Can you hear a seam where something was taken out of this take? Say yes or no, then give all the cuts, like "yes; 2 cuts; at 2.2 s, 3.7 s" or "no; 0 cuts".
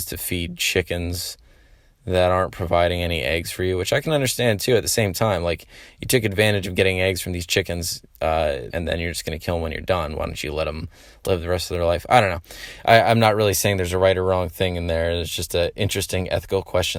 yes; 1 cut; at 8.7 s